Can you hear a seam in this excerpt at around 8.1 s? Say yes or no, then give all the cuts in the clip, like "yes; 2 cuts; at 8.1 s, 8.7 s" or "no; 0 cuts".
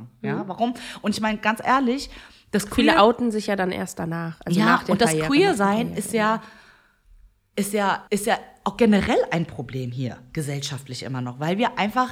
yes; 1 cut; at 8.1 s